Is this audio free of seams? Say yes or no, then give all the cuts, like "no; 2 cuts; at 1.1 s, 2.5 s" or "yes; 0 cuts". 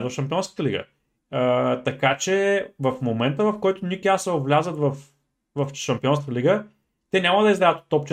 no; 1 cut; at 1.2 s